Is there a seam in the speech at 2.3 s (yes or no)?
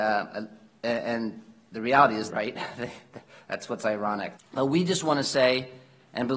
yes